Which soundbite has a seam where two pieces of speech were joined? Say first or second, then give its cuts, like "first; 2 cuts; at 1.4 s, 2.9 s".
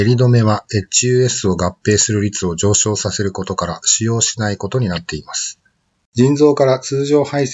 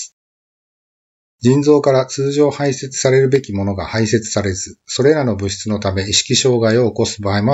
first; 1 cut; at 6.1 s